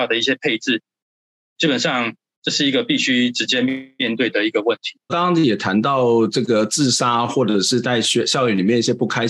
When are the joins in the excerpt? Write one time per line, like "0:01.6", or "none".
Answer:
0:05.1